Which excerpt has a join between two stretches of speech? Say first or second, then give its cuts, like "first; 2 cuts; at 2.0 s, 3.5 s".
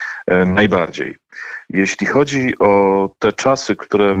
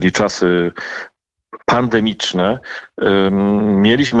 second; 1 cut; at 1.6 s